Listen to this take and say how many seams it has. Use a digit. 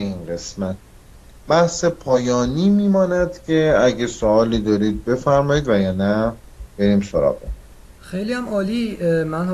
1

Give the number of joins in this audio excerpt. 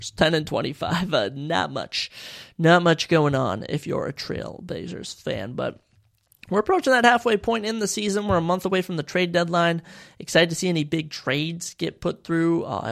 0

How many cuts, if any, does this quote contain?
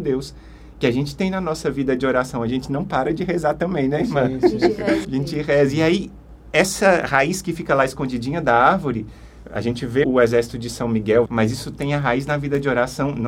3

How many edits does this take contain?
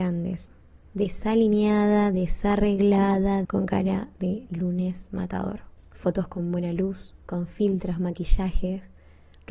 2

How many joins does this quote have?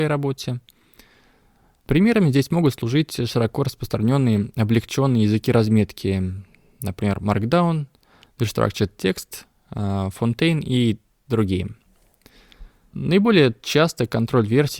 1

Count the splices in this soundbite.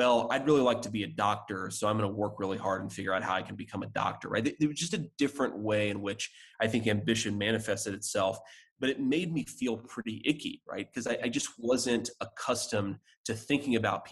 0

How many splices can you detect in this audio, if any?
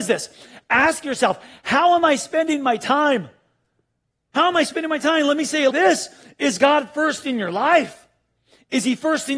1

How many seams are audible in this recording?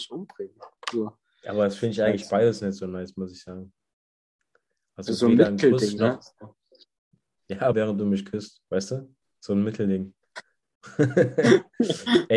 1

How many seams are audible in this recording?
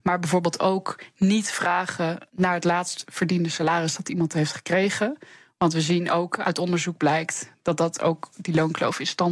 1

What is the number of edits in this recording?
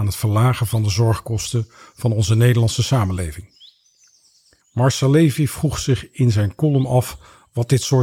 1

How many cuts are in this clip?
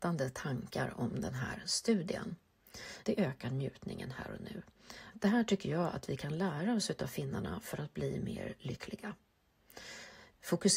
2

